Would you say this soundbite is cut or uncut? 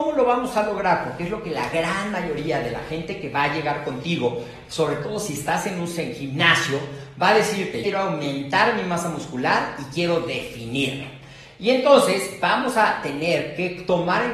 cut